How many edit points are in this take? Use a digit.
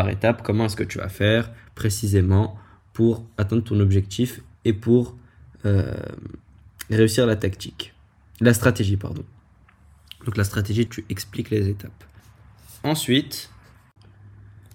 1